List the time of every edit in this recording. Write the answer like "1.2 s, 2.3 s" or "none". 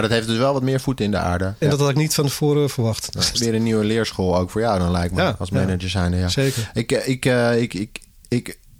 1.6 s, 3.3 s